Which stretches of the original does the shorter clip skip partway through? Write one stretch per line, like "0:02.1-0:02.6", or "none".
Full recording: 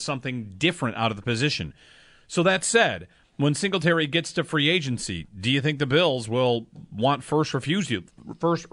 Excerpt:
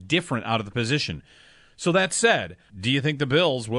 0:03.2-0:05.3